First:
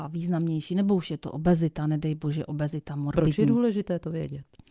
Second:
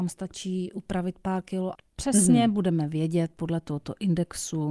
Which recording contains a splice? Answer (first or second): second